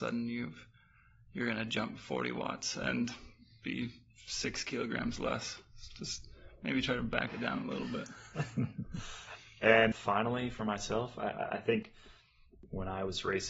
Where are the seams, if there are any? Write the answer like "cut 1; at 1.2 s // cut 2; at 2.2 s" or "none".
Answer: cut 1; at 9.9 s